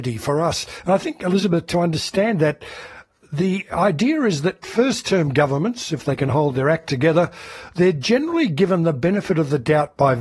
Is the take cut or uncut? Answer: uncut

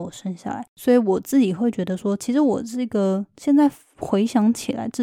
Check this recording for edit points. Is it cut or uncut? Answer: uncut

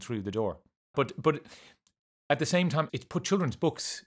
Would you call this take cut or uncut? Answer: cut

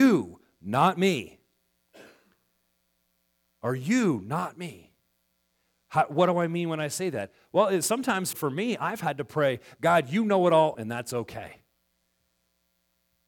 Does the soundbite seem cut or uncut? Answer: cut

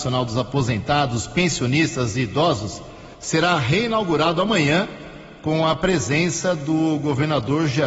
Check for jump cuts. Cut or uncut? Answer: uncut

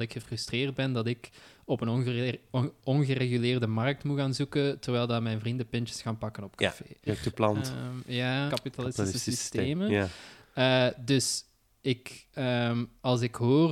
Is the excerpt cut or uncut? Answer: cut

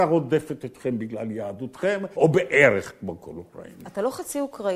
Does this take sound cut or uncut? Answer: cut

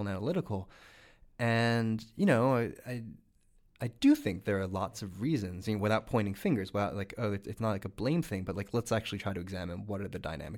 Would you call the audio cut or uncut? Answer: uncut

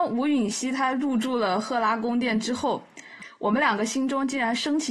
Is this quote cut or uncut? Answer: uncut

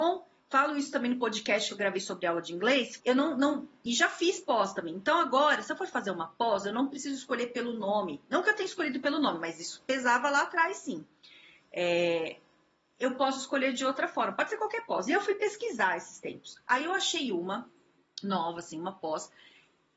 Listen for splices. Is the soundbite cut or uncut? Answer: cut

